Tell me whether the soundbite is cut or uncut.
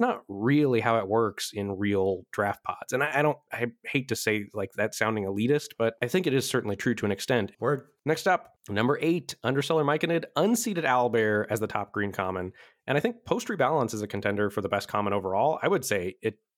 cut